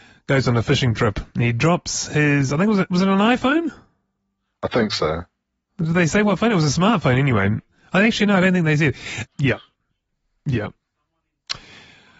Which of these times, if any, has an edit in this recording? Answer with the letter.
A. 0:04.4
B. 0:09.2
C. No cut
B